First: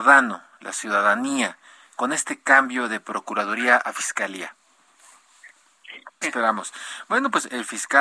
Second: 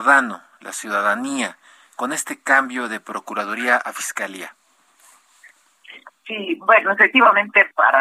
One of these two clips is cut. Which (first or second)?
first